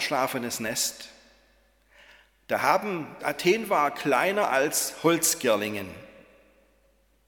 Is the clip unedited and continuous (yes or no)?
no